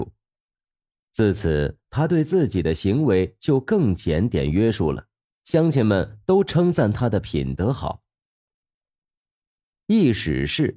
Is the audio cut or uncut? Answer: uncut